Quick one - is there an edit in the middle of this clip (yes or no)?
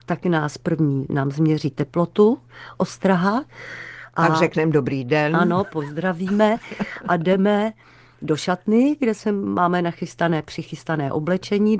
no